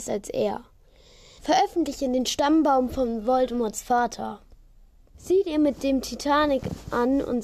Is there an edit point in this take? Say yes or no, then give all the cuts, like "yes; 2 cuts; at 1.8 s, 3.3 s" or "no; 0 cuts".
yes; 2 cuts; at 1.4 s, 5.1 s